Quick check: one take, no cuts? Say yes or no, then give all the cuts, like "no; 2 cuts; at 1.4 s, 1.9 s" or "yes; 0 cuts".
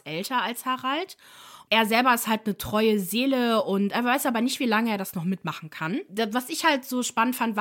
yes; 0 cuts